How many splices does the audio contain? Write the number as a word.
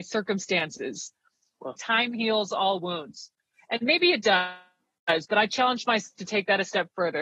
one